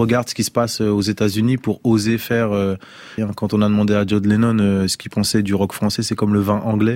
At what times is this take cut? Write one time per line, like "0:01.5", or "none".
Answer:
0:03.2
0:06.0